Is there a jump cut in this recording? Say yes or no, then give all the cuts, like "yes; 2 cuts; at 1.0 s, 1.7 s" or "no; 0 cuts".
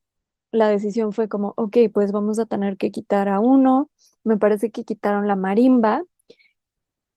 no; 0 cuts